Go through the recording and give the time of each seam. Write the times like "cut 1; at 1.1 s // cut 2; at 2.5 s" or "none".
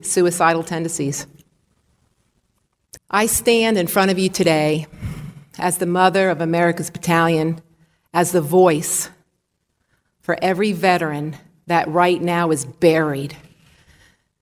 cut 1; at 3.0 s